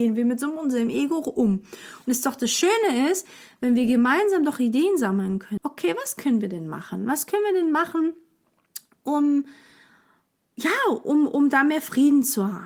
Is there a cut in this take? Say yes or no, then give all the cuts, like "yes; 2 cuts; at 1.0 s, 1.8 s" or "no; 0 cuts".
yes; 1 cut; at 5.6 s